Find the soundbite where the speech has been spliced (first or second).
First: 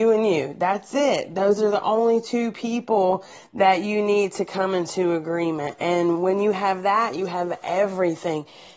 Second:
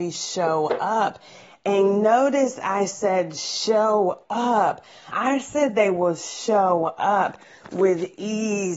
second